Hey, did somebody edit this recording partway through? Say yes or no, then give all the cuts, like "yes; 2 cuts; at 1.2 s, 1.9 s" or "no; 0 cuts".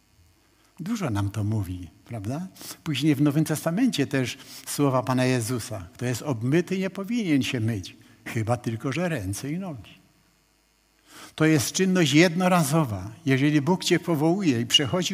no; 0 cuts